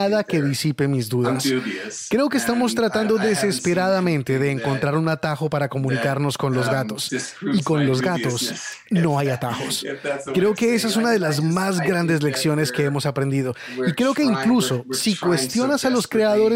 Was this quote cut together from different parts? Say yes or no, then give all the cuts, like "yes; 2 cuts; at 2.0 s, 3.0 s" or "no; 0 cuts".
no; 0 cuts